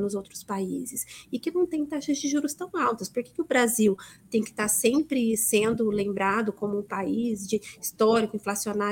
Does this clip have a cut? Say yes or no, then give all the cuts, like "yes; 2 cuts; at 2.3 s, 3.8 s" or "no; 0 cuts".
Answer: no; 0 cuts